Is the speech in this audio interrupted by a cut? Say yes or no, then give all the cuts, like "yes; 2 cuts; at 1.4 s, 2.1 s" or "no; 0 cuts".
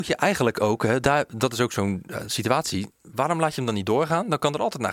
no; 0 cuts